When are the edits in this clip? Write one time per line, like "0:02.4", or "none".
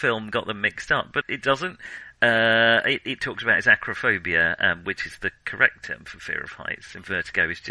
0:01.2